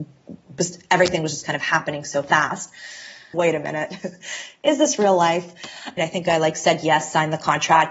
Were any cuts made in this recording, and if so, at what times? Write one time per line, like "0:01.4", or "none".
0:03.3
0:06.0